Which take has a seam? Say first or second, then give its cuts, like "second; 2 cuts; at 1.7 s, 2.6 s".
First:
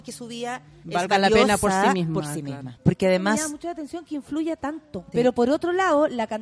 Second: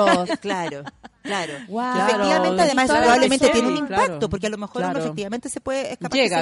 first; 2 cuts; at 2.8 s, 5.1 s